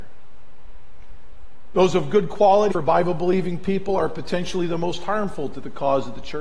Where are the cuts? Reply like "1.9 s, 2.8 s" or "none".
2.7 s

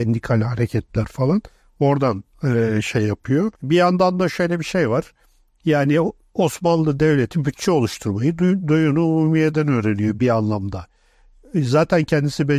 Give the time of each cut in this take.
3.5 s

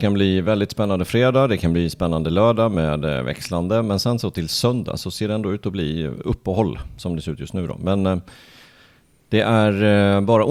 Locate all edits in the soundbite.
none

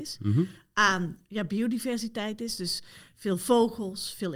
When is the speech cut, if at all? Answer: none

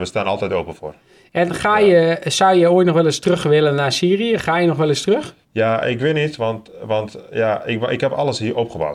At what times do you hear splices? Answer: 5.4 s

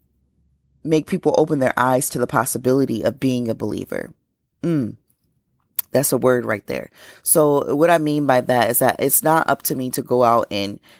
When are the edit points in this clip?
none

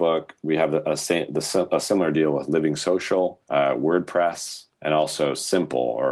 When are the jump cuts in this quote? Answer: 3.4 s, 4.7 s

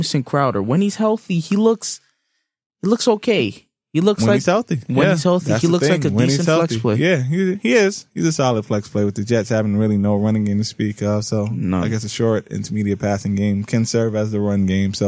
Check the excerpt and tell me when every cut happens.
none

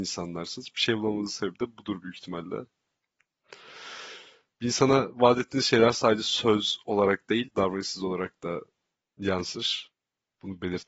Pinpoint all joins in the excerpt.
7.5 s

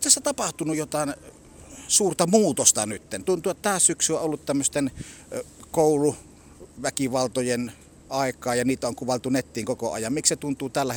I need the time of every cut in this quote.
none

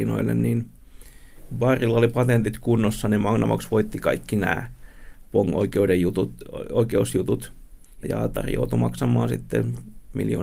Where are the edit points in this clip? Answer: 8.0 s

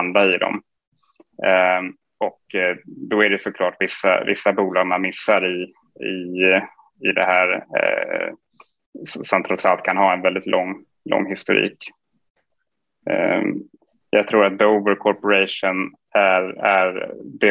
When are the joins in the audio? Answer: none

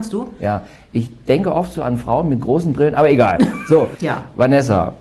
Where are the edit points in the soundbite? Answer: 3.9 s

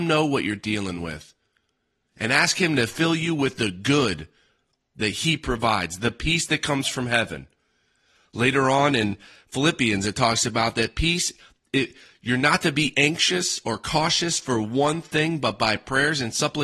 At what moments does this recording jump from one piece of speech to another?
none

